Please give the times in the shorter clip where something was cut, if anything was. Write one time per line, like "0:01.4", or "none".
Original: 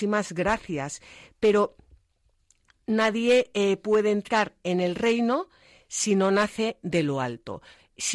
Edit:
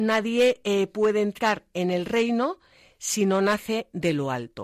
none